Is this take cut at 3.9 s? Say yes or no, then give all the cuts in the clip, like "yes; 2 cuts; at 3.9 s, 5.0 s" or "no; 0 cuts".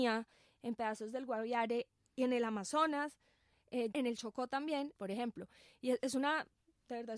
yes; 2 cuts; at 3.9 s, 5.0 s